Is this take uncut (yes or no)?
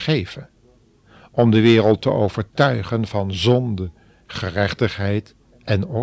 yes